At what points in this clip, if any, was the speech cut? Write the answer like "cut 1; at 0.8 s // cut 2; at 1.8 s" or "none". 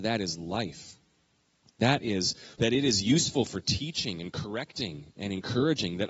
cut 1; at 2.5 s